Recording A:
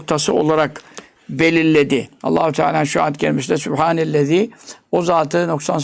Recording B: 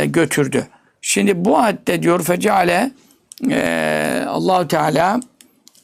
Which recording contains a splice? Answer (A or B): A